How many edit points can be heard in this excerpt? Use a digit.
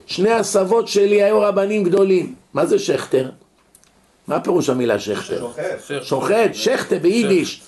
2